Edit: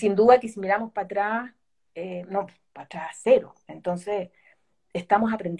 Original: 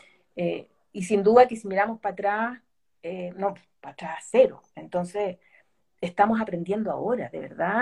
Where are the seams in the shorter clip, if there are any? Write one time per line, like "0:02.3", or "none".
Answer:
none

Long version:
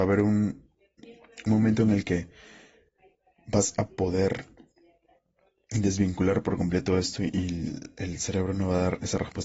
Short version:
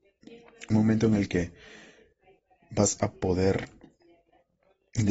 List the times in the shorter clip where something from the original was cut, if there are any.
none

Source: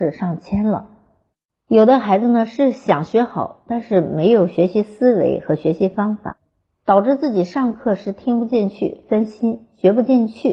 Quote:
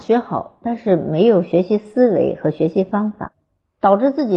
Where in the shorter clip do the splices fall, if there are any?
none

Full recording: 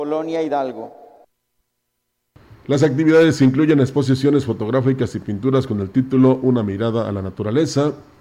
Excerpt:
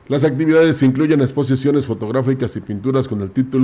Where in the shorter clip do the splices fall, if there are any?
none

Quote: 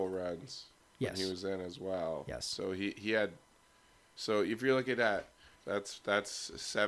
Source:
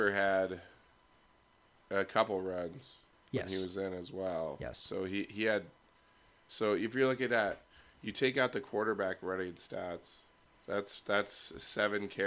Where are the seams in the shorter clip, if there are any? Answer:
0:05.5

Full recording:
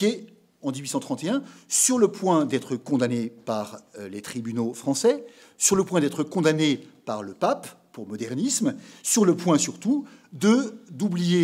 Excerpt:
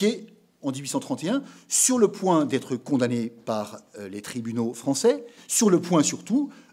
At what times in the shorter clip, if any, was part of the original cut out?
0:05.4

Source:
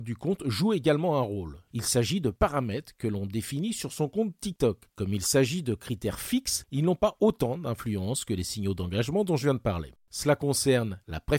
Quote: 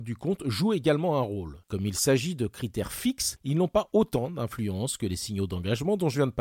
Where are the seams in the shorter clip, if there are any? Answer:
0:01.6

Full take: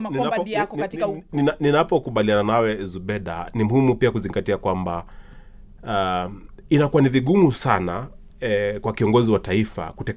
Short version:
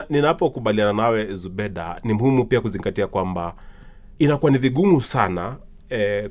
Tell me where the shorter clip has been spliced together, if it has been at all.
0:04.2

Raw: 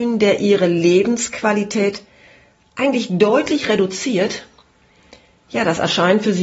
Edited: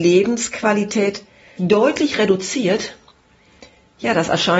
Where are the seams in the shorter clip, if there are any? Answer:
0:01.6

